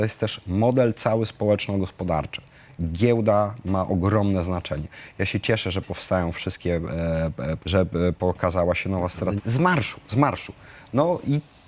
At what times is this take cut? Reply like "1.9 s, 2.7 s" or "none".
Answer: 7.6 s, 9.4 s